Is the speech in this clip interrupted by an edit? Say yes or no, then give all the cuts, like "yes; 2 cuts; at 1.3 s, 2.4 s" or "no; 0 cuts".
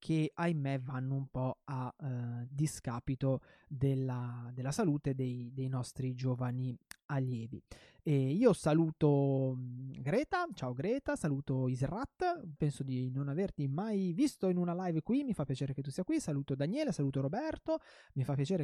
yes; 1 cut; at 12.6 s